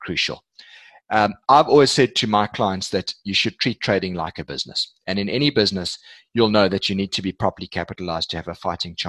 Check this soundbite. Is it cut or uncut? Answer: uncut